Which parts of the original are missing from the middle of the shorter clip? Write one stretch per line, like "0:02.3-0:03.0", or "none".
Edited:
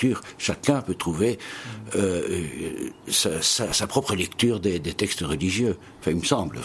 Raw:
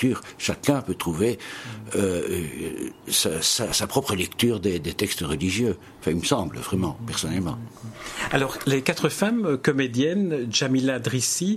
none